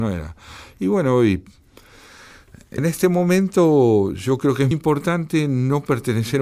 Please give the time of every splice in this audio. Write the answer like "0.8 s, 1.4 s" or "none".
2.8 s, 4.7 s